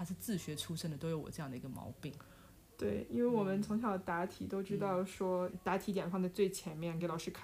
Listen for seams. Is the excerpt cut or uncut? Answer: cut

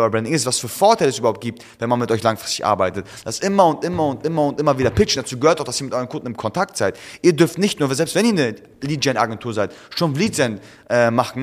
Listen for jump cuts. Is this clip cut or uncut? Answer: uncut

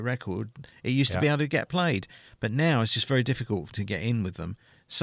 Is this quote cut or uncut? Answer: cut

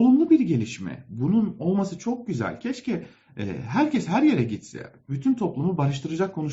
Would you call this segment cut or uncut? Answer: uncut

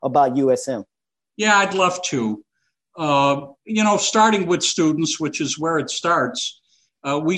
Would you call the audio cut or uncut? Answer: uncut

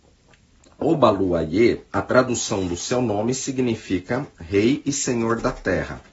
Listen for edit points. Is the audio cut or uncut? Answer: cut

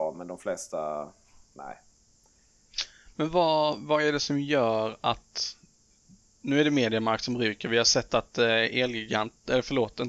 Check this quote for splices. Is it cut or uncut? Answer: uncut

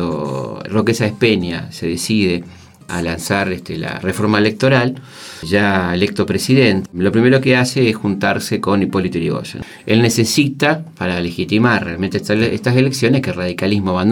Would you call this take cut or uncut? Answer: cut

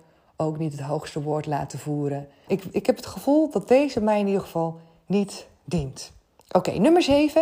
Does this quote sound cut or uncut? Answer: cut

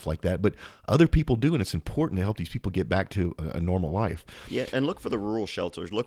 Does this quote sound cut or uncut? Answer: cut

